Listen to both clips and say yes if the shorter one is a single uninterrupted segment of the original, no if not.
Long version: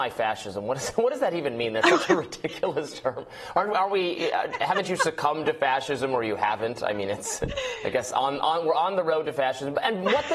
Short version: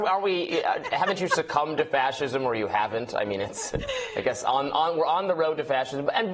yes